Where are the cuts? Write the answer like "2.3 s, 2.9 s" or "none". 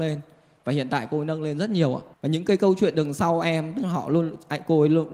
2.1 s